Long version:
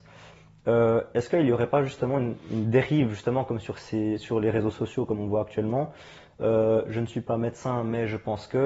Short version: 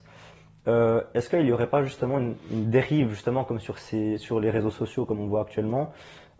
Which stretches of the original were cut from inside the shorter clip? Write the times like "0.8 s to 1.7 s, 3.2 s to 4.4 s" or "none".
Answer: none